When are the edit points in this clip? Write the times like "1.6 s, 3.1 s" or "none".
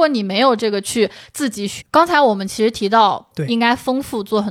1.8 s, 3.3 s

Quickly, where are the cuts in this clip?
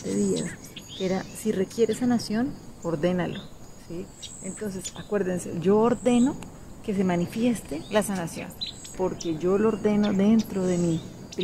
8.9 s

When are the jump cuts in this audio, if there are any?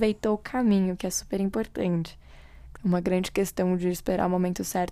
2.7 s

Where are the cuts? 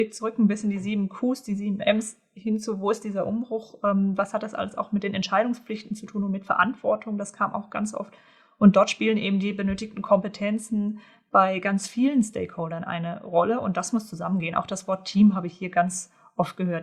none

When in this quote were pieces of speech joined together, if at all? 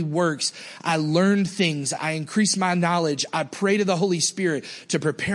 none

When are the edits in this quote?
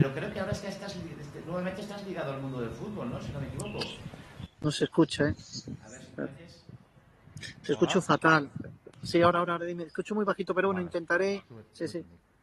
none

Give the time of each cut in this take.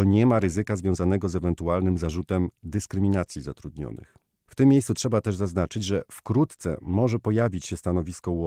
none

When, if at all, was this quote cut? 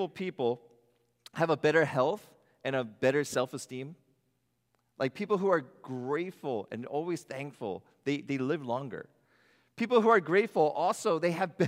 none

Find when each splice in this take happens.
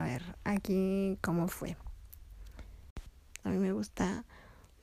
3.4 s

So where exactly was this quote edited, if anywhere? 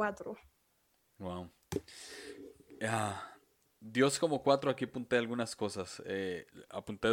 none

